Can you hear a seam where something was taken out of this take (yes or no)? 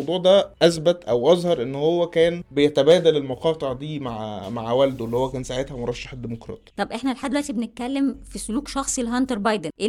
no